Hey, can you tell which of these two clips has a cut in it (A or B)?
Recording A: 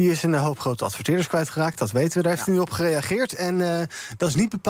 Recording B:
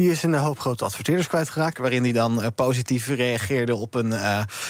B